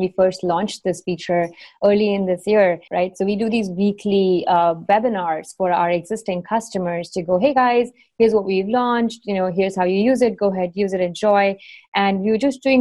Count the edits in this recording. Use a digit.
1